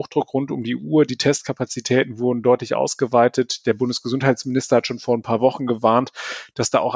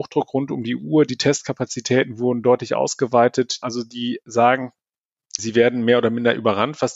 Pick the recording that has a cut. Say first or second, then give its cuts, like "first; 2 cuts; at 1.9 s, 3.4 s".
second; 2 cuts; at 3.6 s, 5.4 s